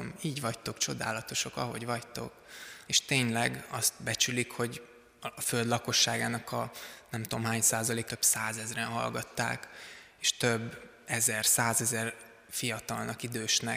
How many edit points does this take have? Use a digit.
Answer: 2